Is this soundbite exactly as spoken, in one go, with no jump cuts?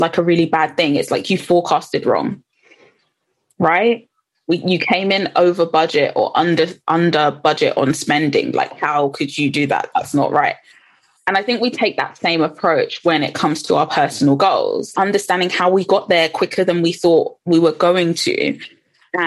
no; 1 cut; at 14.9 s

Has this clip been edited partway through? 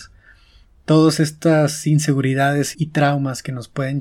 yes; 1 cut; at 2.7 s

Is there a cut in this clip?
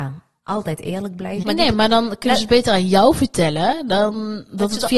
yes; 1 cut; at 1.4 s

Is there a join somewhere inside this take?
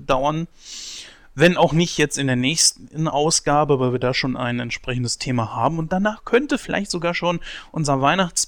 no; 0 cuts

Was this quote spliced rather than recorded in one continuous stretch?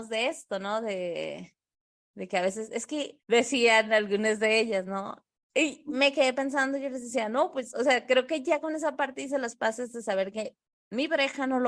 yes; 2 cuts; at 3.2 s, 5.4 s

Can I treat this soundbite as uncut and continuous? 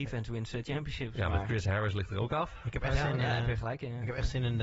yes; 0 cuts

